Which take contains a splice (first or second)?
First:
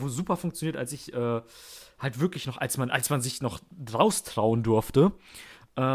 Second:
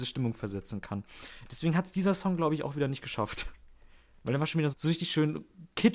second